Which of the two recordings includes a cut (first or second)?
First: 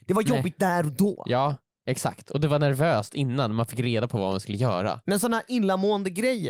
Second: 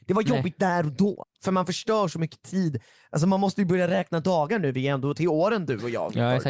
second